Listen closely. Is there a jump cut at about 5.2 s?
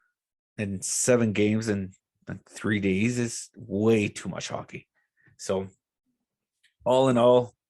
no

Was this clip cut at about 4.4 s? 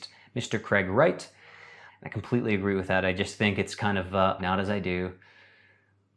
yes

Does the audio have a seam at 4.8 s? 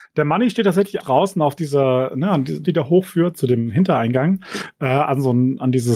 no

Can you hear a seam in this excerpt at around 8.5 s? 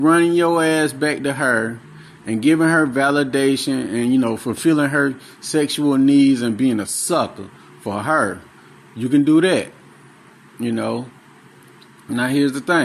no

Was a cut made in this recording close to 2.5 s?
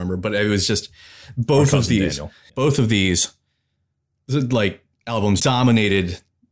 yes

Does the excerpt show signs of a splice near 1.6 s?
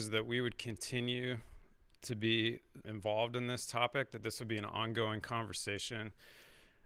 no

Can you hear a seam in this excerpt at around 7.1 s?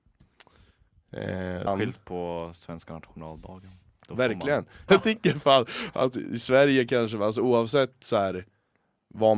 no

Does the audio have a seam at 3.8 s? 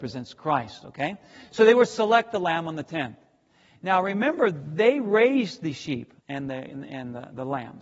yes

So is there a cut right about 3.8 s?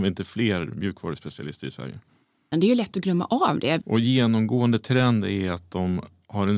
yes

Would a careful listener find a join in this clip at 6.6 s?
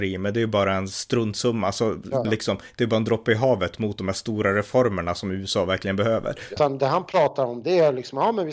yes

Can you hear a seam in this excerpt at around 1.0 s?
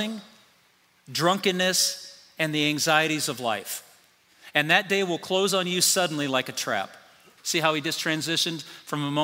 no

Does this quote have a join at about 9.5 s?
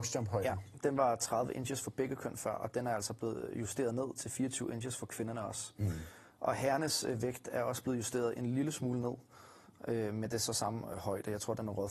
no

